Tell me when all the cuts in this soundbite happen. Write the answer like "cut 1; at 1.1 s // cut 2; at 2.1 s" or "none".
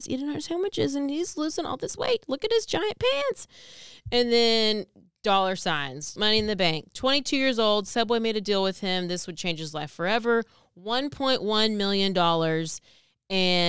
cut 1; at 6.2 s